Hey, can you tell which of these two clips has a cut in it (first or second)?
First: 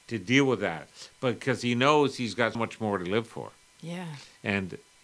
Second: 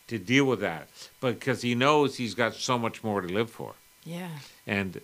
first